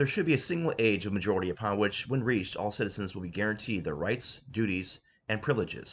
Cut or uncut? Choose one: uncut